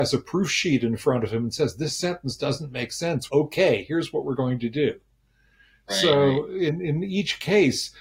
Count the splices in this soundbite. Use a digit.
1